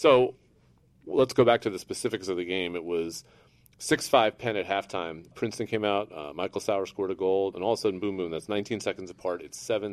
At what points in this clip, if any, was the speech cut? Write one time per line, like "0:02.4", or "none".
0:05.3
0:07.5

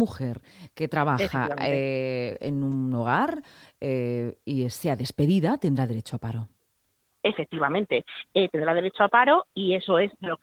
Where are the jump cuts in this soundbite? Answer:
none

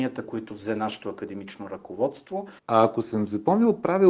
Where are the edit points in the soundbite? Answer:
0:02.6

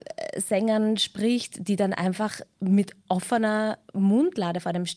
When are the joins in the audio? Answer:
none

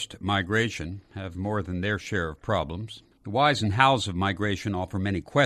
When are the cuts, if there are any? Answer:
0:03.1

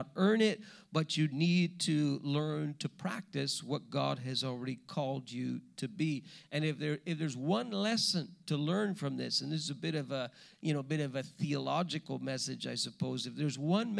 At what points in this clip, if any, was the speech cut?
0:08.4

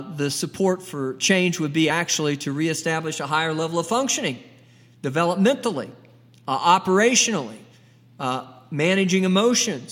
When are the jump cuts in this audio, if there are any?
none

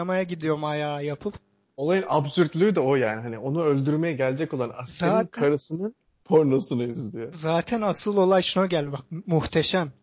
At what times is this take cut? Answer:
none

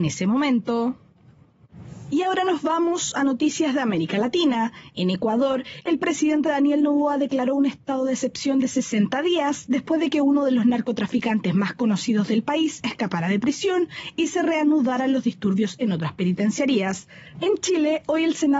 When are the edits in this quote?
0:17.3

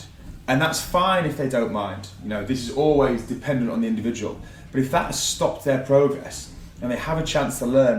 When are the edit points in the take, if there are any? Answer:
none

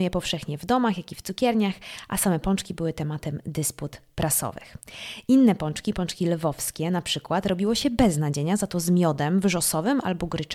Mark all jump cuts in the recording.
none

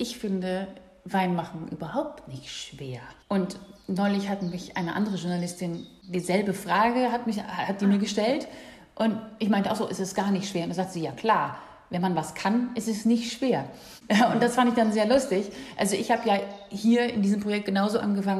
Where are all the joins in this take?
0:03.2

